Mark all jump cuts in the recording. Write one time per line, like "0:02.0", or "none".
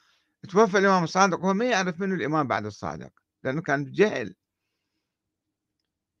0:03.6